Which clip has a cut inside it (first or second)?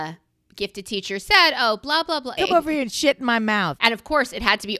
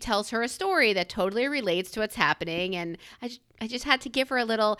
first